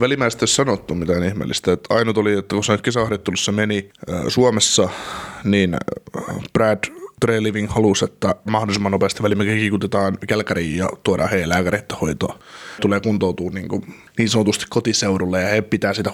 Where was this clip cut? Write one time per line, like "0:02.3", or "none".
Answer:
0:08.5